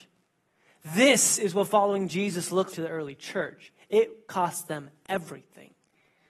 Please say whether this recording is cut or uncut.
cut